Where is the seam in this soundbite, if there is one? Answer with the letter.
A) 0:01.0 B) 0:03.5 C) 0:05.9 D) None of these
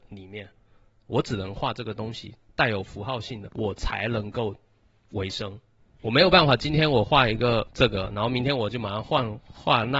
B